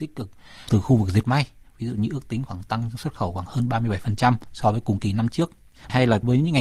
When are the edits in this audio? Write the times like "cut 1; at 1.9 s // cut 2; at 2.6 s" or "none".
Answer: none